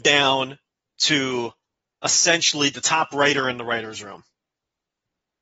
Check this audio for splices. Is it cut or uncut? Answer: uncut